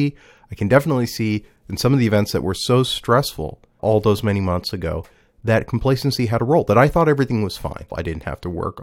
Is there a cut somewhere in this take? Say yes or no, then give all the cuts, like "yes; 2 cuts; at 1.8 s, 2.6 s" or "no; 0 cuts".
yes; 2 cuts; at 3.8 s, 7.9 s